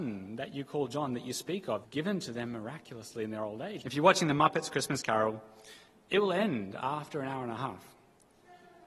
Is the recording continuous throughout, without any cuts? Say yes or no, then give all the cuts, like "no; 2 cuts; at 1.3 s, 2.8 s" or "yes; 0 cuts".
no; 2 cuts; at 1.8 s, 3.8 s